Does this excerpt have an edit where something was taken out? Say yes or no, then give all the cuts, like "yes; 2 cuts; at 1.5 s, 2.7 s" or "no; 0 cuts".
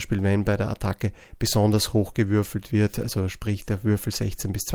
no; 0 cuts